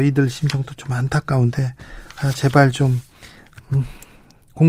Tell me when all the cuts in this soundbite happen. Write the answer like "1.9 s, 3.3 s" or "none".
none